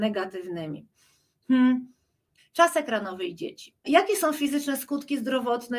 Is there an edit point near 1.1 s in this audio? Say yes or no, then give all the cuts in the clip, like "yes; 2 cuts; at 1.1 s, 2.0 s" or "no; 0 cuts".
no; 2 cuts; at 2.4 s, 3.8 s